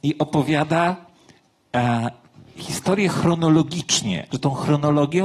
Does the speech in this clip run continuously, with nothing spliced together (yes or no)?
no